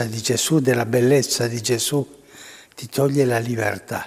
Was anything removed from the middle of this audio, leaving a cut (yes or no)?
no